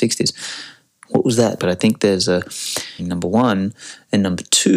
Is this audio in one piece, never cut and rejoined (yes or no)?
no